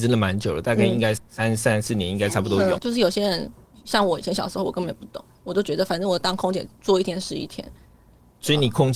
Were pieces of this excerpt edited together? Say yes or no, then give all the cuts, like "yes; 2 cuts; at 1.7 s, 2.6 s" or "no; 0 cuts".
yes; 2 cuts; at 1.2 s, 2.8 s